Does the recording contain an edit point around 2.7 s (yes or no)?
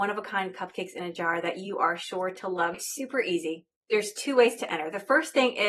yes